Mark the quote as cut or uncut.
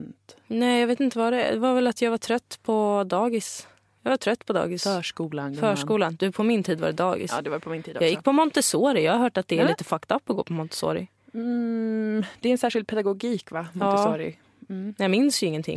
uncut